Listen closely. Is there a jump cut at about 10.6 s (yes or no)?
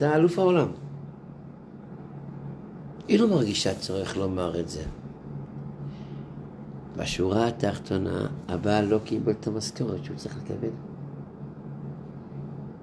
no